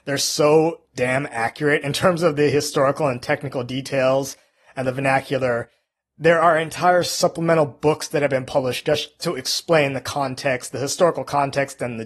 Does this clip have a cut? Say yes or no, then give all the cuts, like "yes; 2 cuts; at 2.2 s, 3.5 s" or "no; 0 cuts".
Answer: yes; 1 cut; at 9.2 s